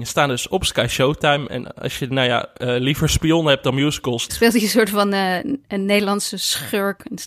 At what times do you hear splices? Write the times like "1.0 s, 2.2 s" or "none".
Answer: 4.3 s